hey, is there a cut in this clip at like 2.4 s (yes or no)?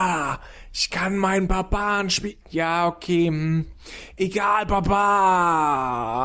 yes